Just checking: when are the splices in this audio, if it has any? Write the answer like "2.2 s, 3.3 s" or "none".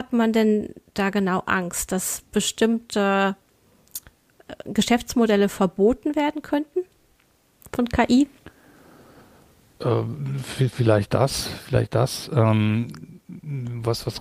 none